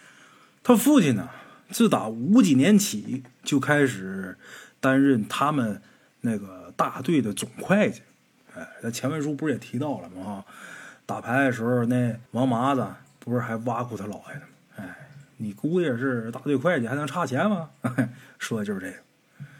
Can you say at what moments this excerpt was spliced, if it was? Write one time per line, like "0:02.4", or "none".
0:12.3

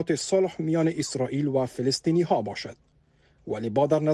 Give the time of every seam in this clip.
none

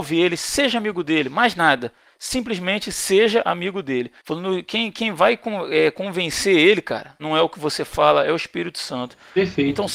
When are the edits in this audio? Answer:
0:04.2
0:07.2

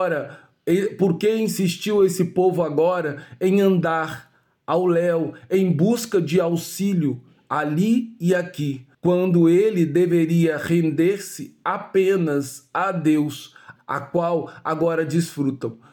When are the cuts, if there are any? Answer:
0:08.9
0:13.8

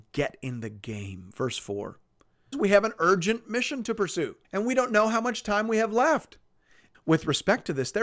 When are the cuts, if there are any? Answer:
0:02.5
0:04.4
0:06.9

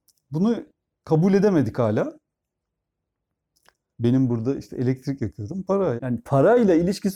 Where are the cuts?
0:03.9
0:06.0

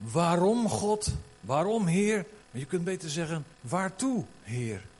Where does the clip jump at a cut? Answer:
0:02.4
0:03.5

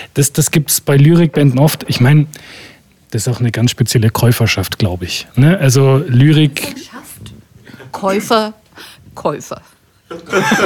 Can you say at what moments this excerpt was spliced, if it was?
none

